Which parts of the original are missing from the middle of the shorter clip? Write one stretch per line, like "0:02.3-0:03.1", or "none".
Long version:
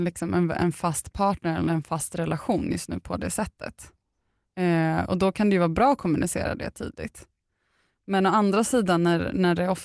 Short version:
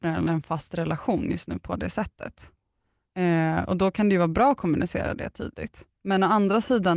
0:07.4-0:08.0